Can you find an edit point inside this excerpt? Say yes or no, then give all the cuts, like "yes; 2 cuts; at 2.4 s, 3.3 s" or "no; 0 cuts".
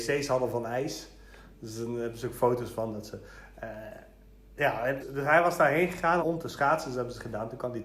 yes; 2 cuts; at 5.0 s, 6.2 s